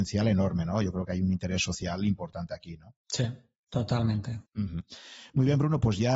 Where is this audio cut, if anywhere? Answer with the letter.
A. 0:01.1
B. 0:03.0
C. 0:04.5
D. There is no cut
C